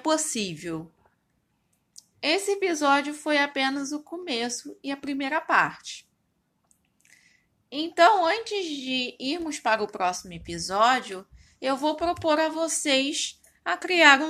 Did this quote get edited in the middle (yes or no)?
no